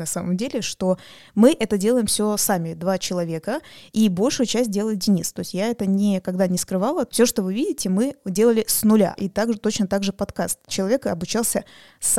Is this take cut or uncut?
cut